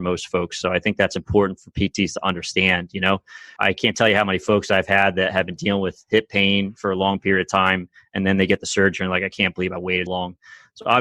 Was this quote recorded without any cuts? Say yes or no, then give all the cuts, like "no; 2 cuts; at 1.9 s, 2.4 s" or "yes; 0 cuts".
no; 2 cuts; at 3.6 s, 10.1 s